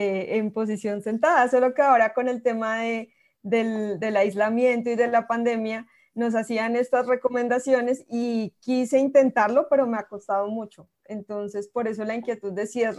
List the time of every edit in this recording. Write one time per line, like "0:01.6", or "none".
none